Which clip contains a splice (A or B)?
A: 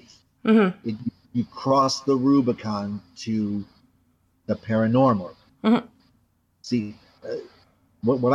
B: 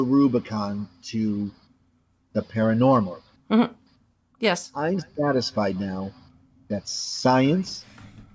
B